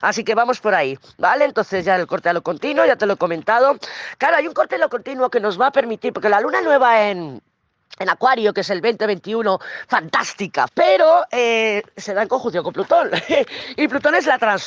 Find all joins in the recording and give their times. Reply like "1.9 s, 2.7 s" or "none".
10.7 s